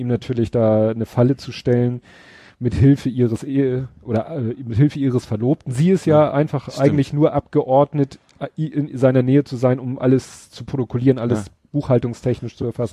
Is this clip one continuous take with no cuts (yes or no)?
yes